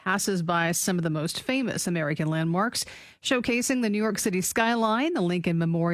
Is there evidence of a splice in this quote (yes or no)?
no